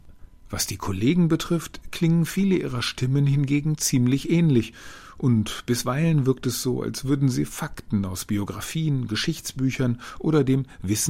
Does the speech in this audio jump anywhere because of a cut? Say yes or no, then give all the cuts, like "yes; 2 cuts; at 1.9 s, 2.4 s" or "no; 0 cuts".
no; 0 cuts